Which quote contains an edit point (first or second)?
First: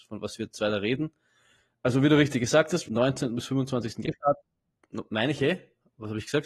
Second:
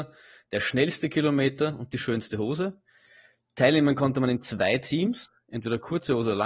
first